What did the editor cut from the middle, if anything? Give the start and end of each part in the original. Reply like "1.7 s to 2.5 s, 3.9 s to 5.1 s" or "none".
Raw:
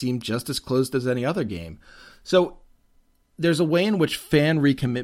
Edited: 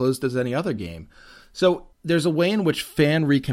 2.6 s to 3.3 s